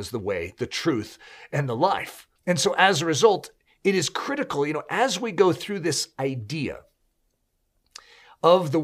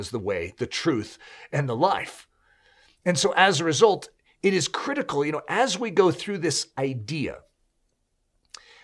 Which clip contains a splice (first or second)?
first